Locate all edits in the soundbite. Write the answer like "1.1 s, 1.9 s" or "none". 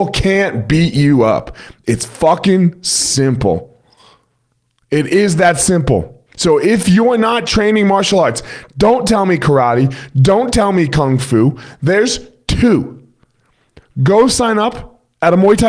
6.3 s